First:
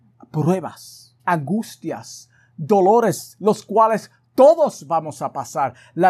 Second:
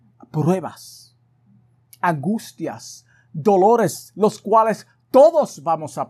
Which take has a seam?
first; 1 cut; at 1.2 s

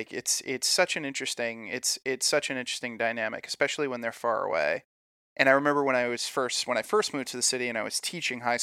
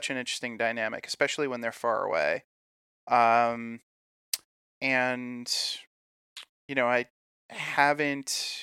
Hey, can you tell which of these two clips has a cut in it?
first; 1 cut; at 5.2 s

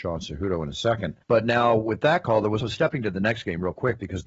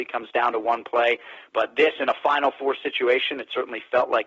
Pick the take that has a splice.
first; 2 cuts; at 1.2 s, 2.6 s

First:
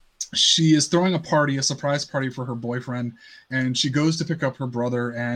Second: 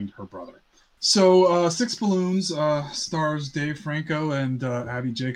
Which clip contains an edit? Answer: second; 1 cut; at 1.0 s

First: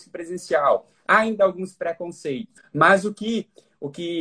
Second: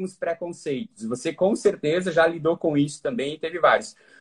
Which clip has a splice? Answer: first; 1 cut; at 2.6 s

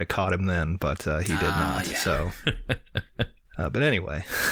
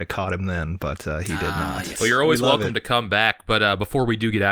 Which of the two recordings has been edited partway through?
second; 1 cut; at 1.9 s

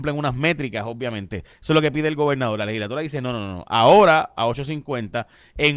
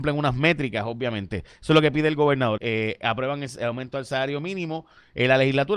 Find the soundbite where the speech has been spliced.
second; 1 cut; at 2.6 s

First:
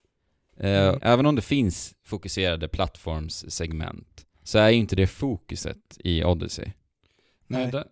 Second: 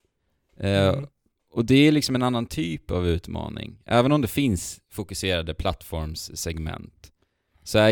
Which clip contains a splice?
first; 2 cuts; at 1.0 s, 4.3 s

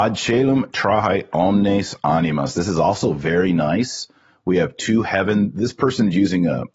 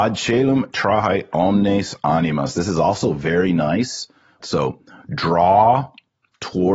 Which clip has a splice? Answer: second; 1 cut; at 4.4 s

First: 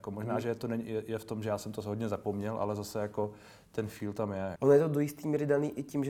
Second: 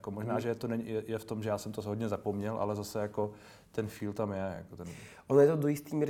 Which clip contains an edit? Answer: first; 1 cut; at 4.6 s

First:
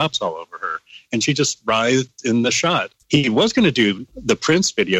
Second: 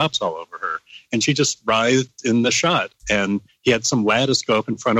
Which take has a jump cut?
first; 2 cuts; at 3.0 s, 4.1 s

